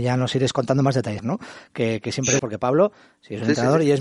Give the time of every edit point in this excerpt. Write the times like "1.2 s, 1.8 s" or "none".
1.2 s, 2.4 s